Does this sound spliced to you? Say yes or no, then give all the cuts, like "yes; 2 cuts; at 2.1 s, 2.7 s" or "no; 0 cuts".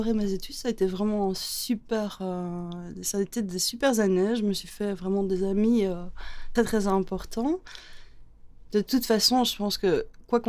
yes; 2 cuts; at 6.6 s, 8.7 s